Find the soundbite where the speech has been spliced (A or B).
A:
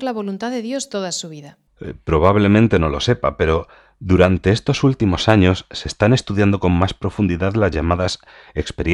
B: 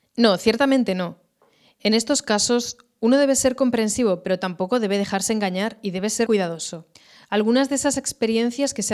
B